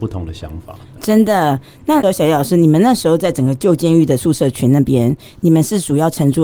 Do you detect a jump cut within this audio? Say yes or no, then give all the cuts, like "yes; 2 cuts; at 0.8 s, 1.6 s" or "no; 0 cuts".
no; 0 cuts